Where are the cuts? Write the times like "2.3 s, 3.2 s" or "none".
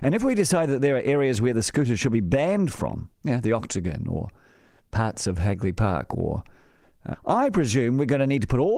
3.1 s, 7.1 s